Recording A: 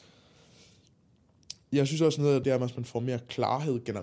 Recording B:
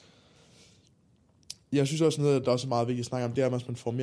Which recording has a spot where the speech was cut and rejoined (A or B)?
A